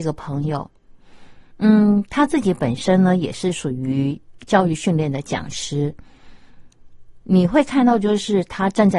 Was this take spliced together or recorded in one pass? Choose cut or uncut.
cut